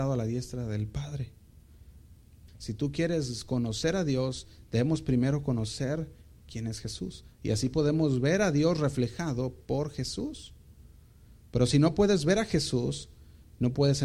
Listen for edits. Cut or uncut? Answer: cut